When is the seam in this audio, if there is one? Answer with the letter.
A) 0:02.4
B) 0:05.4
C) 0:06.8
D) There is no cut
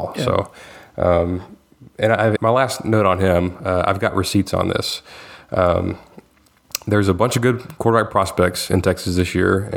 A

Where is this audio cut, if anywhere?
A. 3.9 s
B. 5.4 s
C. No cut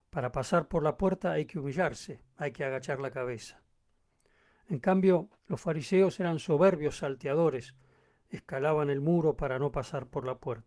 B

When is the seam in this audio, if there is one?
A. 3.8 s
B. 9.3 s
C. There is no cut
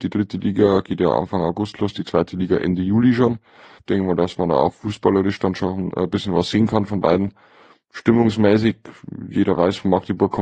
A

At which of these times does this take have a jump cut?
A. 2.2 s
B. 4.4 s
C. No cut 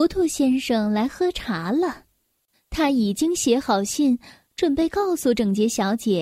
C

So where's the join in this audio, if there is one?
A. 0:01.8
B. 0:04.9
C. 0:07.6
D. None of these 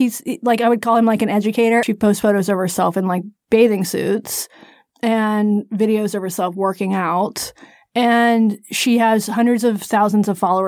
A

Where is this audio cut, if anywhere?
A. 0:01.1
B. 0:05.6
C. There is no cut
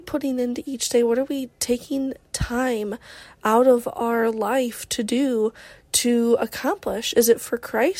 C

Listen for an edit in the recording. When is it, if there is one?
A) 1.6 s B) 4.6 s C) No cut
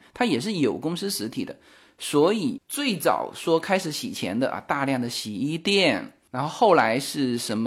C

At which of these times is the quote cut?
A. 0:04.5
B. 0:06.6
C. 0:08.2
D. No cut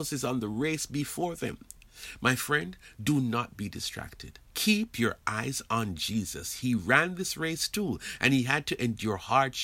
A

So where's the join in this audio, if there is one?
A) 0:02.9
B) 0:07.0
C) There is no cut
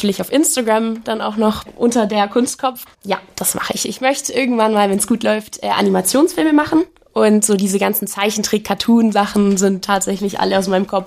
A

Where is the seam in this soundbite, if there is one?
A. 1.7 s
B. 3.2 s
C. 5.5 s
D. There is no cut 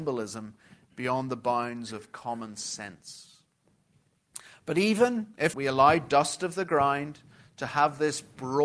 C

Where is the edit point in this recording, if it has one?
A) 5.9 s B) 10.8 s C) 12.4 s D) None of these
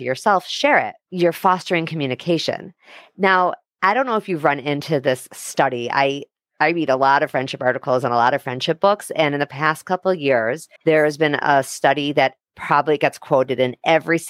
B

